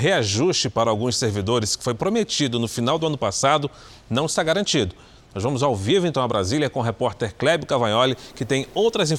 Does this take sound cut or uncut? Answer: uncut